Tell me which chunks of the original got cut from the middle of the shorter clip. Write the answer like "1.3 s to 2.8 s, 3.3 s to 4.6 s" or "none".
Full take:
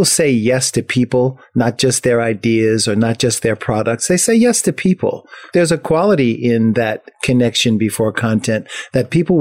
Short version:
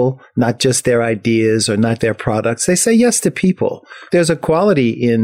3.2 s to 3.4 s